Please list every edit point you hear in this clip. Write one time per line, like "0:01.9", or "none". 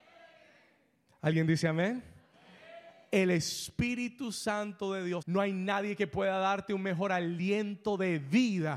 0:05.2